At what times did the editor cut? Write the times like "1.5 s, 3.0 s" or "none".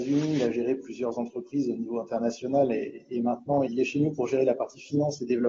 3.6 s